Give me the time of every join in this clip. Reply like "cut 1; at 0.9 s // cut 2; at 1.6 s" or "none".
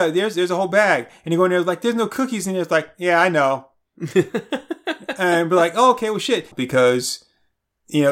cut 1; at 6.5 s

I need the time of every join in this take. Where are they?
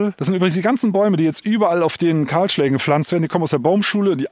none

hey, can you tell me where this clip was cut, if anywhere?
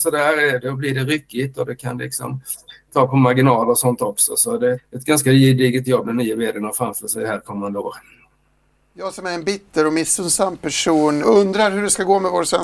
cut 1; at 4.8 s // cut 2; at 11.2 s

